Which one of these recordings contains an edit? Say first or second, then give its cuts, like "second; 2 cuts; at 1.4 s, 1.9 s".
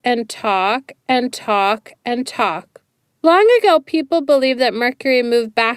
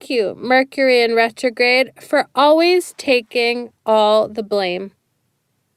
first; 1 cut; at 3.1 s